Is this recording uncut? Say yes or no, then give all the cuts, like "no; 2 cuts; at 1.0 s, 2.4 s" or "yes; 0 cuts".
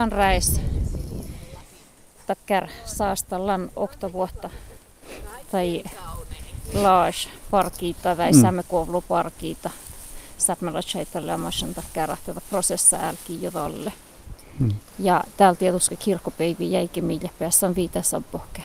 yes; 0 cuts